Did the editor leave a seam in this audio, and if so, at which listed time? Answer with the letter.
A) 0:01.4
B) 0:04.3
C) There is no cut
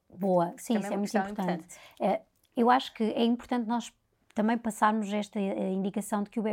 C